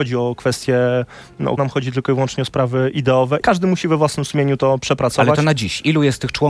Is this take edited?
yes; 2 cuts; at 1.6 s, 3.4 s

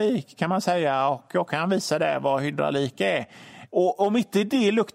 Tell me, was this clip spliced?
yes; 1 cut; at 3.7 s

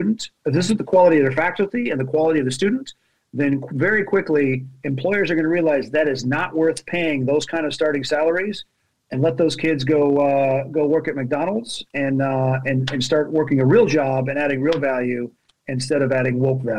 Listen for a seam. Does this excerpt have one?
no; 0 cuts

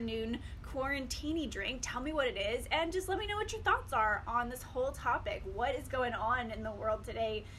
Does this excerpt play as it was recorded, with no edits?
yes; 0 cuts

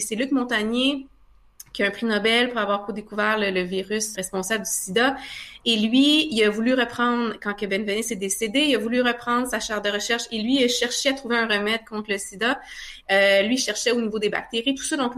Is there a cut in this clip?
yes; 2 cuts; at 4.1 s, 13.0 s

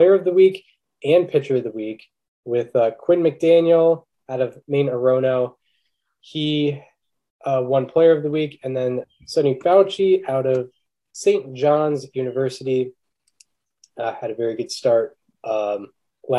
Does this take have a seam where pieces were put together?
no; 0 cuts

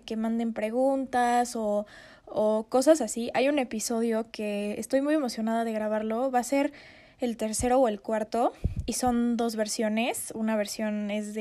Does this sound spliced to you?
no; 0 cuts

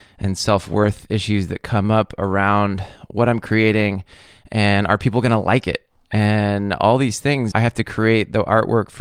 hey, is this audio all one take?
no; 1 cut; at 7.5 s

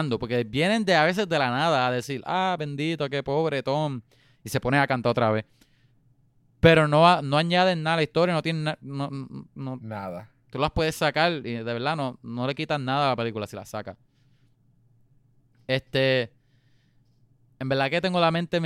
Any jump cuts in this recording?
no; 0 cuts

